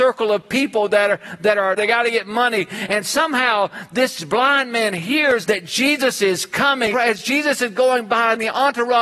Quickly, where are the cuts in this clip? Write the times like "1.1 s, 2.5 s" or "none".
1.8 s, 5.4 s, 6.9 s

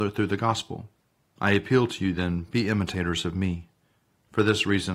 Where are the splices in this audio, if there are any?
none

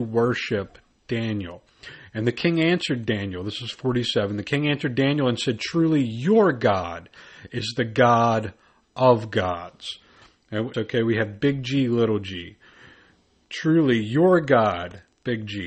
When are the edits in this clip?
10.7 s

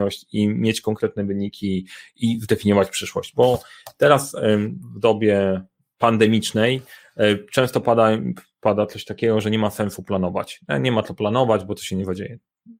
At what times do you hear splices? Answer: none

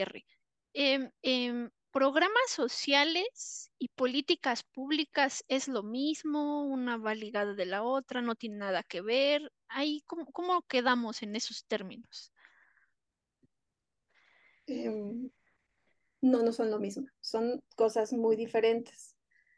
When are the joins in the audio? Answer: 1.1 s

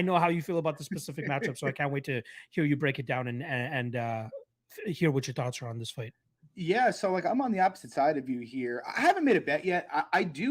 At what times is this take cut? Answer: none

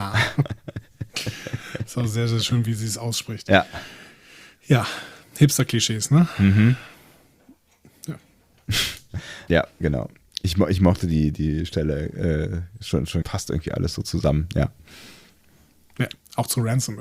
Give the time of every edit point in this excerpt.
9.5 s, 13.2 s

